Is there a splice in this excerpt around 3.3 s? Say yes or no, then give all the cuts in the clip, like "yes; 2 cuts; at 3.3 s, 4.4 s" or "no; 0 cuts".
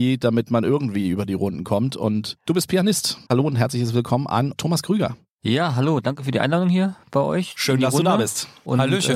yes; 1 cut; at 3.3 s